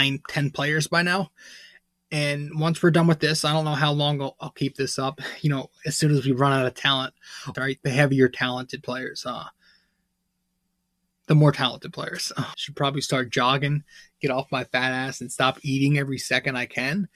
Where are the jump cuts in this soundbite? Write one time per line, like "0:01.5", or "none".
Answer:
0:07.5
0:12.5